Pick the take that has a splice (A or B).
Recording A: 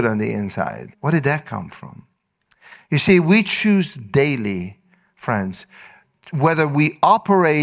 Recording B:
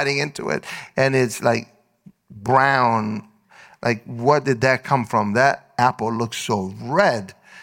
A